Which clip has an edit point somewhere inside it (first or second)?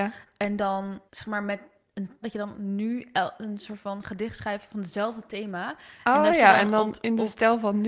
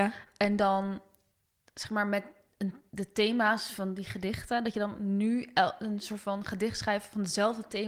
first